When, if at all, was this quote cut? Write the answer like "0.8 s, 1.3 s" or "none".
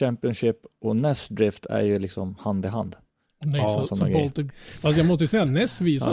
4.5 s